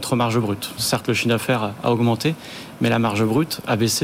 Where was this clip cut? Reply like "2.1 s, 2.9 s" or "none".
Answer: none